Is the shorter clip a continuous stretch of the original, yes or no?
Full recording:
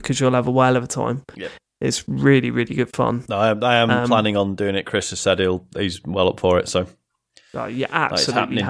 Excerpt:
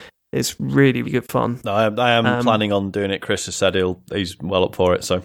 no